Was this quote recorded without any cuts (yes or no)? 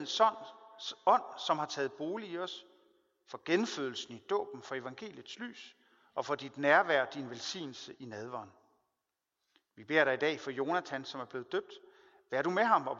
yes